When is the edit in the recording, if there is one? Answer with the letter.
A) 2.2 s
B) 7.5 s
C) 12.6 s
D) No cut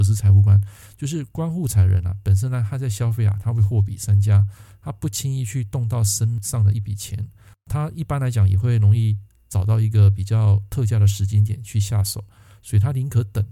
B